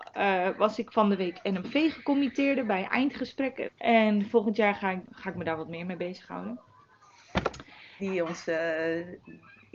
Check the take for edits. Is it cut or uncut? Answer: cut